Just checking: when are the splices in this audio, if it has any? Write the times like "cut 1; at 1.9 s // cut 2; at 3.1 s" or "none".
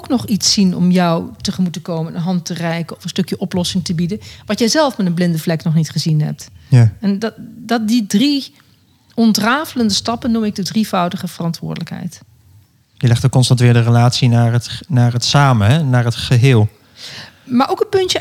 none